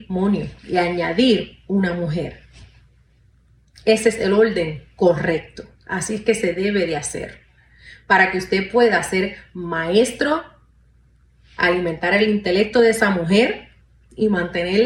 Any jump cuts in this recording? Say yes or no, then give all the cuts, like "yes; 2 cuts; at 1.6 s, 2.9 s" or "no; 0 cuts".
no; 0 cuts